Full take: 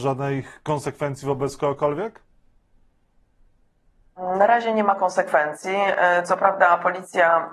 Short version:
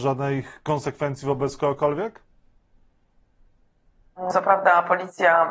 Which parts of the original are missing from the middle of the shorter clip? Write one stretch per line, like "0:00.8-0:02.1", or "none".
0:04.3-0:06.3